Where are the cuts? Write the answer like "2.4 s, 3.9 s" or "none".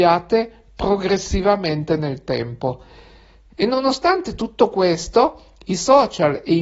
3.5 s